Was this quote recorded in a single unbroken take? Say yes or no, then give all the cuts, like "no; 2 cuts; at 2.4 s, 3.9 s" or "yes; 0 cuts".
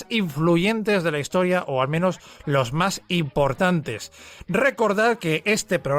yes; 0 cuts